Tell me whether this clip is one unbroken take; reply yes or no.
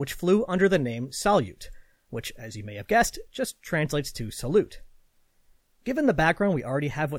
yes